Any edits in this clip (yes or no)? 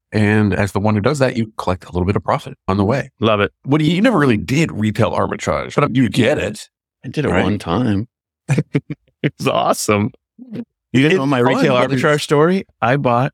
no